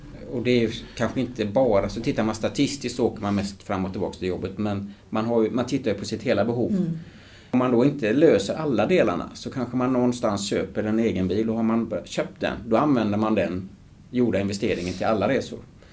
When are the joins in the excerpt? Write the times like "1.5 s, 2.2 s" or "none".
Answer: none